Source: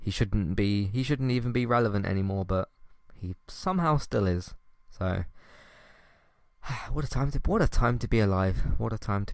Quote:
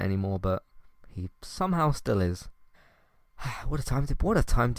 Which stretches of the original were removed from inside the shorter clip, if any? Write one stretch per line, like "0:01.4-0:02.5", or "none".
0:04.8-0:06.0